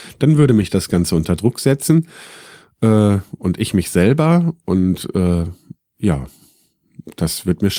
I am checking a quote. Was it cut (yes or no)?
no